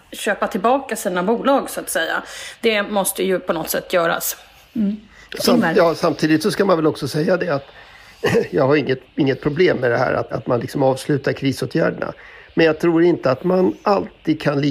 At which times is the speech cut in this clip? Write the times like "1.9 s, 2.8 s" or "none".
10.3 s